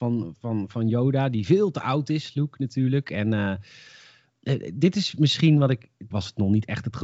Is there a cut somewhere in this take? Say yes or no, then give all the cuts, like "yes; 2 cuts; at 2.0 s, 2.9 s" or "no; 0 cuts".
yes; 1 cut; at 6.1 s